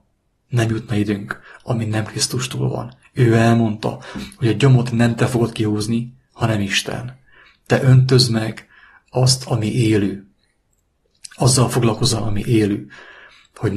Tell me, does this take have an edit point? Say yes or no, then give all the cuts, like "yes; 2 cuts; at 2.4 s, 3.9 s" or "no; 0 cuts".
no; 0 cuts